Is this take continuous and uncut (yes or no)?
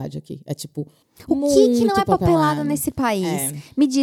yes